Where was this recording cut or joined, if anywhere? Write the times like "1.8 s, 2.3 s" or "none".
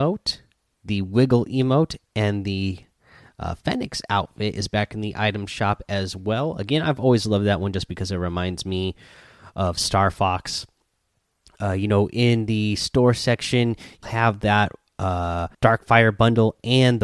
14.0 s, 15.5 s